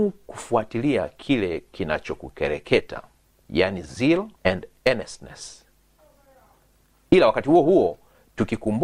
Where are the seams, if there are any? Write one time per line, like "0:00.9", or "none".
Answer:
0:04.4